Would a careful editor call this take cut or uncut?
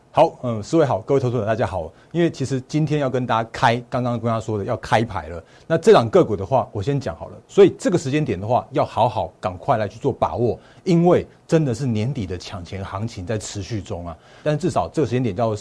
cut